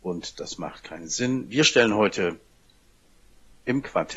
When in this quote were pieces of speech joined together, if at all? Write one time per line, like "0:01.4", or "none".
none